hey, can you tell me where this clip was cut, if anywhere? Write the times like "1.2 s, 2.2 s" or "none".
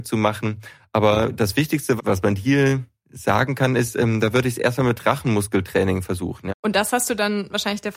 2.0 s, 6.5 s